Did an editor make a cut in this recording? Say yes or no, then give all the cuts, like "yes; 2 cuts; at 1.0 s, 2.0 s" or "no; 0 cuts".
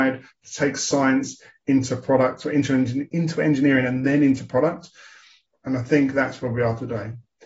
yes; 2 cuts; at 3.1 s, 5.5 s